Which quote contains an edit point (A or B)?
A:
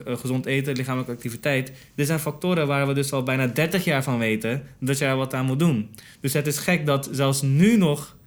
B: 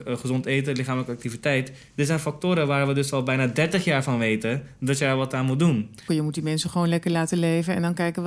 B